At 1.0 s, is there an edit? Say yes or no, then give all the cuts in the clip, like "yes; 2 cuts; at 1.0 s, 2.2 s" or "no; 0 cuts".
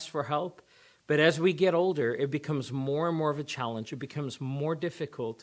no; 0 cuts